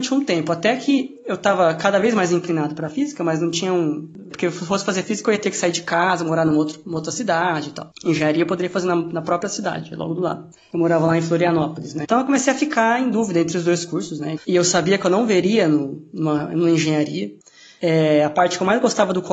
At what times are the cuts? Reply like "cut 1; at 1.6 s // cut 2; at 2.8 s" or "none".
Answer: cut 1; at 4.3 s // cut 2; at 12.0 s // cut 3; at 14.4 s